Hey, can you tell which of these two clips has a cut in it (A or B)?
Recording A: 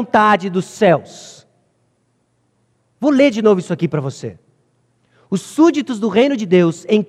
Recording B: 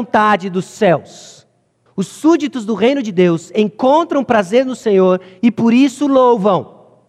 B